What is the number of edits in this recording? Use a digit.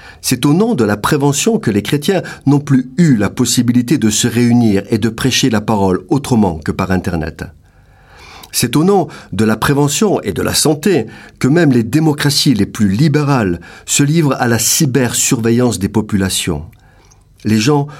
0